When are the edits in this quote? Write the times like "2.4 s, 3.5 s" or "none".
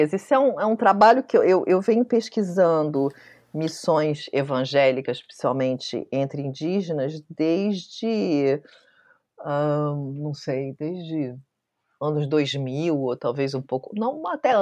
none